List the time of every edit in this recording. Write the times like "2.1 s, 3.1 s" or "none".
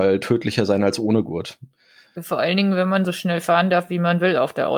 none